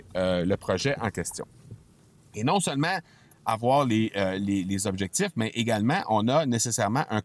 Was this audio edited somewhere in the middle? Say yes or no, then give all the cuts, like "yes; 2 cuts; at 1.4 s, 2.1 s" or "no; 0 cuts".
no; 0 cuts